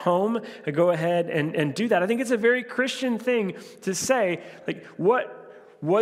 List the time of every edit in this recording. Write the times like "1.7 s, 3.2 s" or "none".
none